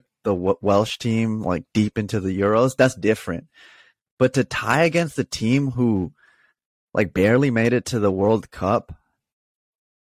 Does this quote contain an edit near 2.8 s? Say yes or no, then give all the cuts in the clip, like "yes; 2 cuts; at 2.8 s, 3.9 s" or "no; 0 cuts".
no; 0 cuts